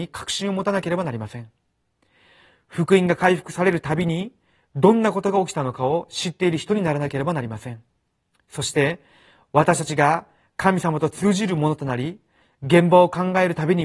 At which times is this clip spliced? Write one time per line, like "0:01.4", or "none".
none